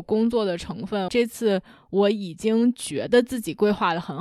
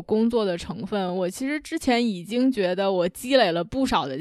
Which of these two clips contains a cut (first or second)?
first